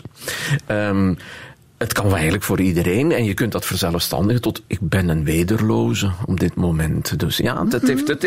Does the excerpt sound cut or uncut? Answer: cut